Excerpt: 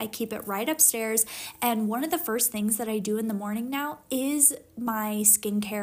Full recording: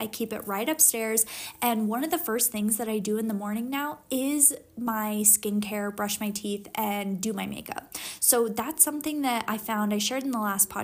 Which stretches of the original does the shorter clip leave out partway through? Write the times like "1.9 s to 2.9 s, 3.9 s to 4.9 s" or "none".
none